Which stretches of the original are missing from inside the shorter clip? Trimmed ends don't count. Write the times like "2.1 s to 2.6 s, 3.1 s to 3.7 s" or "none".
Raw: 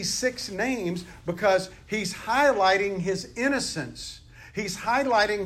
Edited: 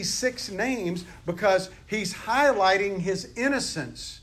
none